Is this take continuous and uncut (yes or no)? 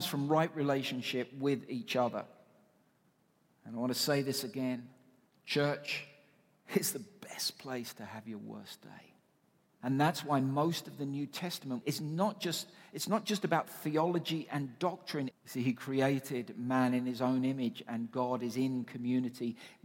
no